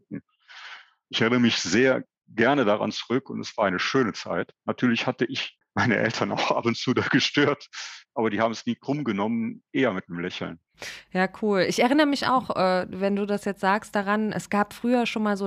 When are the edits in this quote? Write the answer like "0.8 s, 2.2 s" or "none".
none